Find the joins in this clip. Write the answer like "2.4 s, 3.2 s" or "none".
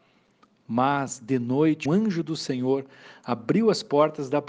1.8 s